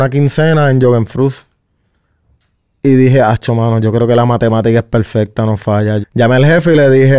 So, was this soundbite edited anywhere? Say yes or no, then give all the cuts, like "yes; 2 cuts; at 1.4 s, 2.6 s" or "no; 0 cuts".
yes; 1 cut; at 6.0 s